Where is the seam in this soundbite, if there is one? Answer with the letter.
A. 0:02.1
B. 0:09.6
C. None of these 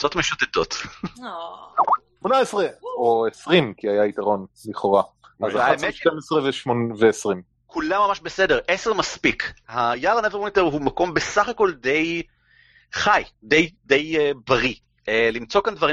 C